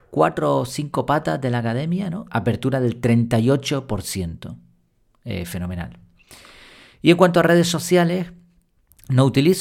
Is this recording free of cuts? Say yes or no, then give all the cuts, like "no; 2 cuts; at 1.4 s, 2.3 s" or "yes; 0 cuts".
no; 1 cut; at 2.3 s